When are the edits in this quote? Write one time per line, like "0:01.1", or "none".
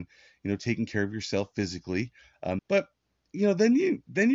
0:02.6